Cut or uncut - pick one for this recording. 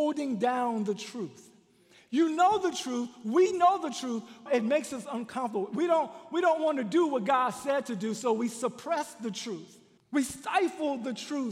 cut